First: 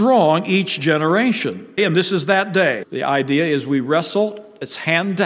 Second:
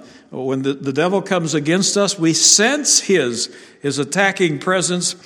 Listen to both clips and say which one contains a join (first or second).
first